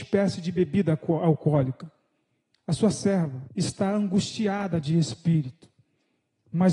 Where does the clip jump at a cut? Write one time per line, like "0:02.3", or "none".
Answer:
0:03.5